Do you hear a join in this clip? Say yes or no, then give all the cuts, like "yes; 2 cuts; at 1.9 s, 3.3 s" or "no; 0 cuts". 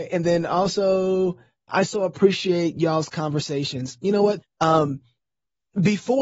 yes; 2 cuts; at 1.7 s, 4.4 s